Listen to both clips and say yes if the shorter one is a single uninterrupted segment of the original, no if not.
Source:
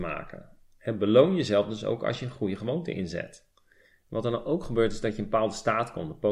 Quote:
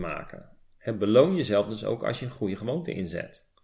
yes